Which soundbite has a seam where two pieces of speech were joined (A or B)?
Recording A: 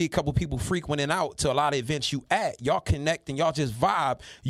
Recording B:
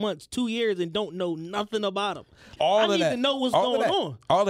B